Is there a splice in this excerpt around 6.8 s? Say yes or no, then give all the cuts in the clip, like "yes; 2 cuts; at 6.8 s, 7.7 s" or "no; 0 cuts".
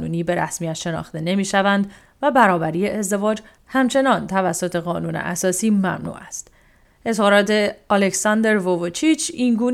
yes; 1 cut; at 6.8 s